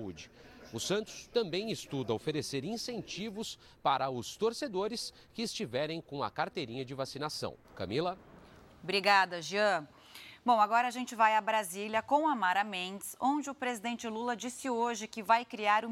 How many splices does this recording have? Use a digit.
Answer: 1